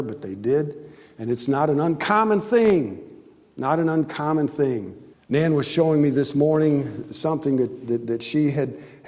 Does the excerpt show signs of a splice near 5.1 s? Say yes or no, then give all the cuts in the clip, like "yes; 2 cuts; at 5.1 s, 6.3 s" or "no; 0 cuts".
yes; 1 cut; at 5.1 s